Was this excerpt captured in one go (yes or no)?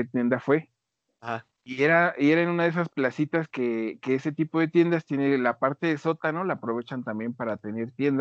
yes